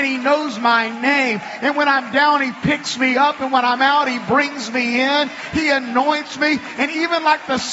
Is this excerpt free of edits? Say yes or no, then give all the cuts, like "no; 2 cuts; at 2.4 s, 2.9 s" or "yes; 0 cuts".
yes; 0 cuts